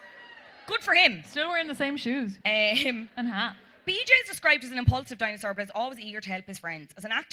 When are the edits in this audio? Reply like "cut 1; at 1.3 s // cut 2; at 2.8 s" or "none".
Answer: cut 1; at 2.4 s

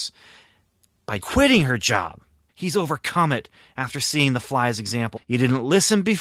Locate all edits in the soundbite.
cut 1; at 1.2 s // cut 2; at 2.5 s // cut 3; at 5.2 s

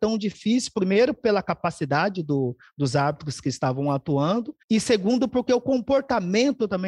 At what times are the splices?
cut 1; at 4.6 s

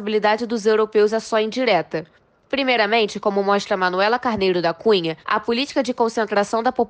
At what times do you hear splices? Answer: cut 1; at 5.2 s

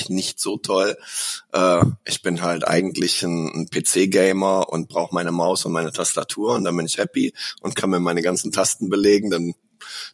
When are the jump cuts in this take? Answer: none

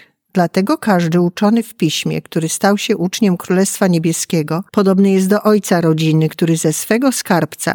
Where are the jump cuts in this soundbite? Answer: cut 1; at 4.7 s

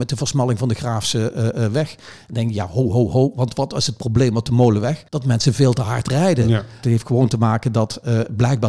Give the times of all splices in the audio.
cut 1; at 5.1 s // cut 2; at 6.8 s

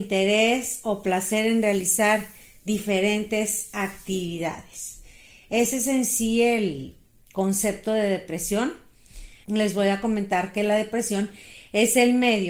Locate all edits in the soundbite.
cut 1; at 9.4 s

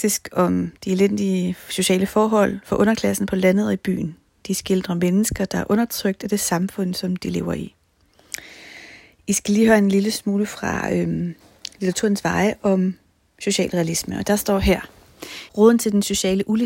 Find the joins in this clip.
cut 1; at 15.5 s

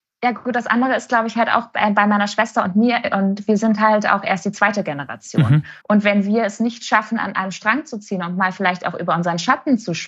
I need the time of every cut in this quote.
cut 1; at 5.8 s

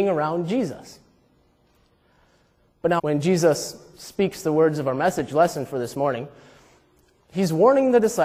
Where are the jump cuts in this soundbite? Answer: cut 1; at 3.0 s

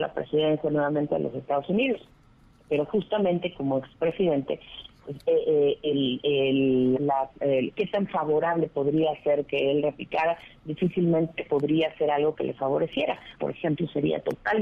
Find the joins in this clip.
cut 1; at 7.0 s // cut 2; at 13.4 s

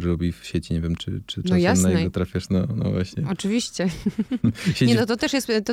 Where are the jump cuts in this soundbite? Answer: cut 1; at 1.0 s

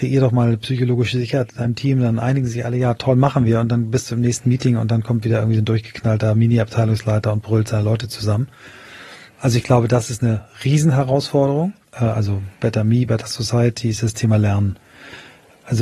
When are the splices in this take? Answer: cut 1; at 11.8 s // cut 2; at 13.1 s

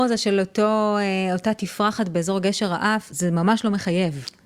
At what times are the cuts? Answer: cut 1; at 3.1 s

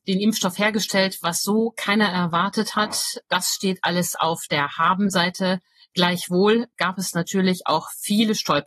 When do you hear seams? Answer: cut 1; at 3.3 s // cut 2; at 6.7 s

